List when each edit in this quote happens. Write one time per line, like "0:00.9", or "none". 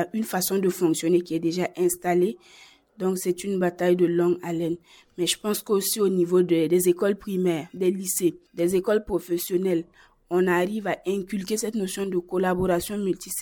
none